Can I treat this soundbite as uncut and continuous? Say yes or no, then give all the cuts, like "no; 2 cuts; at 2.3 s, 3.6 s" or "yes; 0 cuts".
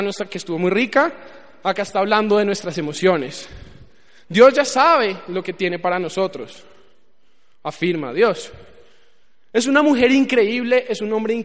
yes; 0 cuts